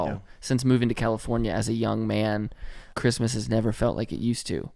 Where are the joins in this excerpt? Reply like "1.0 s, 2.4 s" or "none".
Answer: 2.9 s